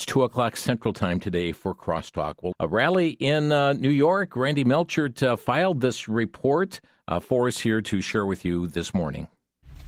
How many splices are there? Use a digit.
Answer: 1